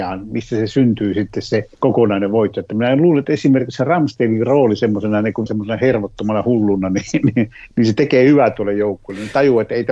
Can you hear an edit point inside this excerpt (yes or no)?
yes